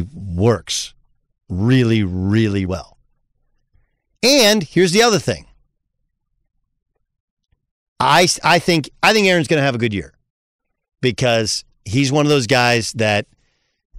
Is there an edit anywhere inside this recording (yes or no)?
yes